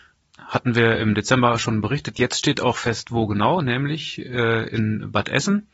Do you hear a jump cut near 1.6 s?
no; 0 cuts

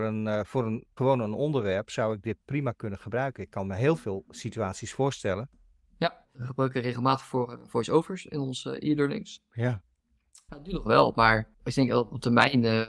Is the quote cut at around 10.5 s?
yes; 2 cuts; at 6.2 s, 10.5 s

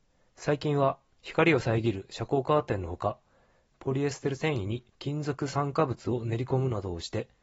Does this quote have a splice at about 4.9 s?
yes; 1 cut; at 4.9 s

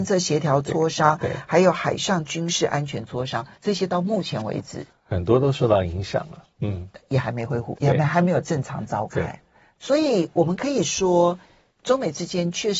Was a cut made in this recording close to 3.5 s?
yes; 3 cuts; at 3.5 s, 7.7 s, 9.7 s

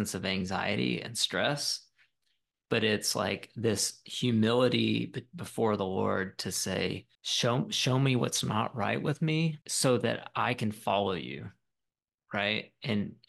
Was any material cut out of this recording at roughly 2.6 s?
no; 2 cuts; at 7.2 s, 9.6 s

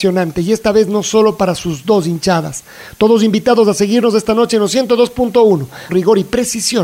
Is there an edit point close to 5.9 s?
yes; 1 cut; at 5.9 s

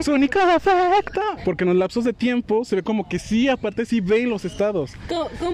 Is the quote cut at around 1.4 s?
yes; 1 cut; at 1.4 s

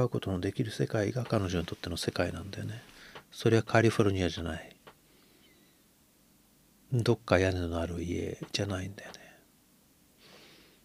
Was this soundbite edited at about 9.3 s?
no; 0 cuts

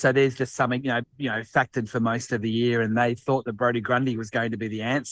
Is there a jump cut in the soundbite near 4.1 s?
no; 1 cut; at 1.0 s

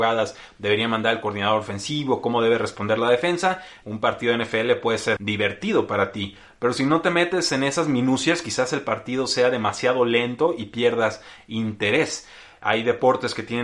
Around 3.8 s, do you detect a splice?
yes; 2 cuts; at 3.8 s, 5.2 s

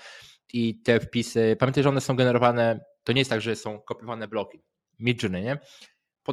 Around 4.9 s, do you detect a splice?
yes; 1 cut; at 4.9 s

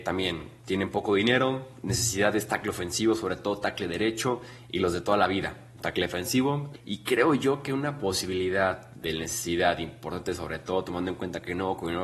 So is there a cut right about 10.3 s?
no; 1 cut; at 6.7 s

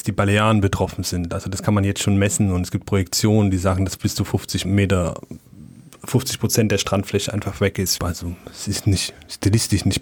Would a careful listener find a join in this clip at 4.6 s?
yes; 2 cuts; at 4.6 s, 8.0 s

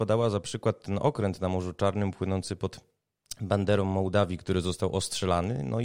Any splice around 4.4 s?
no; 0 cuts

